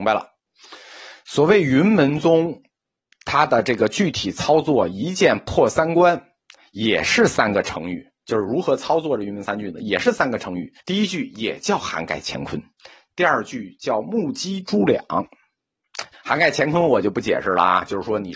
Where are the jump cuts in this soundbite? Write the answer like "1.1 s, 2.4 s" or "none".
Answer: 10.8 s, 16.1 s